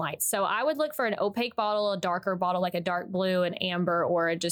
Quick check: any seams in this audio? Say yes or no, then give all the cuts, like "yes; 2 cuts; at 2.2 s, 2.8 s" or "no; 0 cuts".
no; 0 cuts